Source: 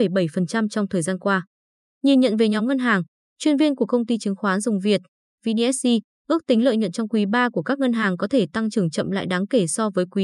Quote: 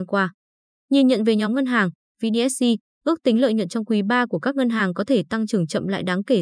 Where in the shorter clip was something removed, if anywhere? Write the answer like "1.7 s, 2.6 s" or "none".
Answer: 2.1 s